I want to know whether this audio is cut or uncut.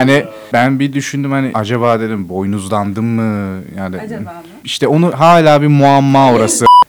uncut